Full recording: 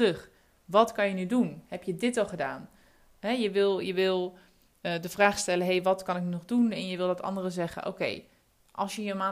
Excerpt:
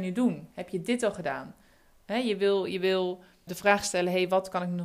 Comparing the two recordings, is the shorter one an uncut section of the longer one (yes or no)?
no